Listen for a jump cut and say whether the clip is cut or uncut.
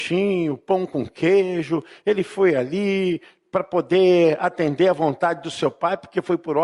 uncut